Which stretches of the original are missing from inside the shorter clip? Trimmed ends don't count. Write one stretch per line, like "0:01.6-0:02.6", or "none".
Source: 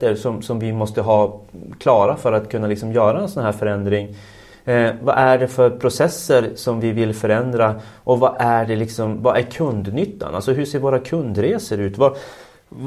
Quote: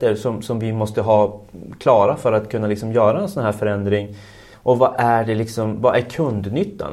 0:04.5-0:07.9